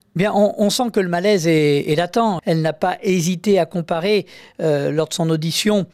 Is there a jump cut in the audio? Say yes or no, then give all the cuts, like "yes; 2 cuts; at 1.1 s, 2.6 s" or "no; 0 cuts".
yes; 1 cut; at 2.4 s